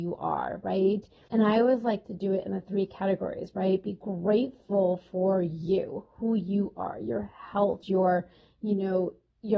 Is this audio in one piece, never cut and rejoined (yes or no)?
no